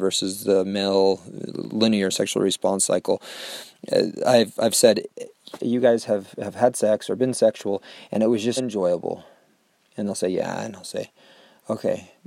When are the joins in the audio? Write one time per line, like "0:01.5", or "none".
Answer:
0:05.6
0:08.6